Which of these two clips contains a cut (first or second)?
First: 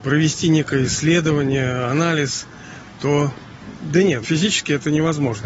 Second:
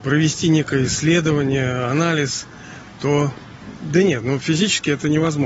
first